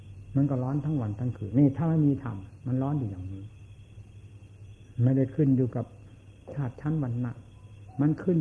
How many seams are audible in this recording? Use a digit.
1